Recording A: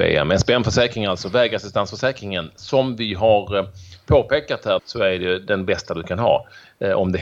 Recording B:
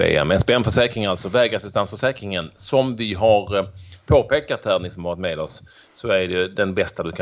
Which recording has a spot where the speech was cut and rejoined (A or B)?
A